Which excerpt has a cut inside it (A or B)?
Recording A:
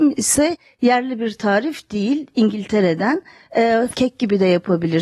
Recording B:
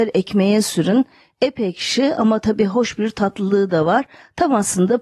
A